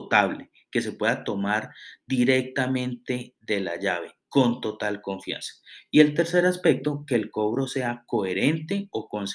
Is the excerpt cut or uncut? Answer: uncut